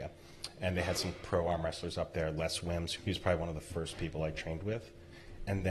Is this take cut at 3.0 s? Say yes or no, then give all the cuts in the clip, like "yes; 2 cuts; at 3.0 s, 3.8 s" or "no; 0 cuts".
yes; 1 cut; at 3.0 s